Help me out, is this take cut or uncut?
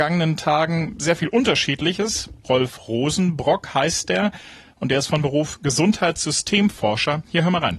cut